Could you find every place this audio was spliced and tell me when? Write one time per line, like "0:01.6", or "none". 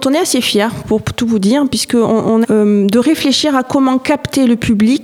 0:02.4